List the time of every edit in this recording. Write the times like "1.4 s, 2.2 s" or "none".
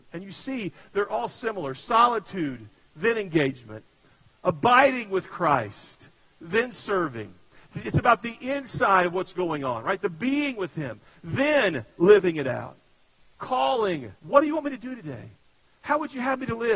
14.2 s